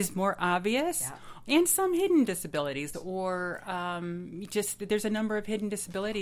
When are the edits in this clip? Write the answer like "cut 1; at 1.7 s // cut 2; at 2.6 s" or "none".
cut 1; at 2.9 s